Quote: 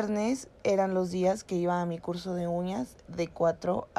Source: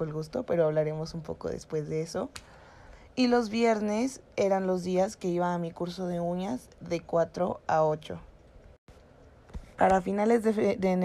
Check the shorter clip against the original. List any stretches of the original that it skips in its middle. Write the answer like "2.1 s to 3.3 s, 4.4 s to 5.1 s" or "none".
none